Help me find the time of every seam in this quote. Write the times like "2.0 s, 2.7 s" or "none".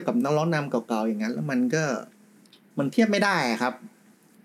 none